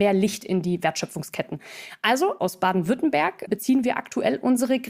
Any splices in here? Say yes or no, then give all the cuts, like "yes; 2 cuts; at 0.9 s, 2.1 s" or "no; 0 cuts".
no; 0 cuts